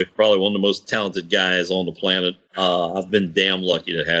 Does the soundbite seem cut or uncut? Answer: uncut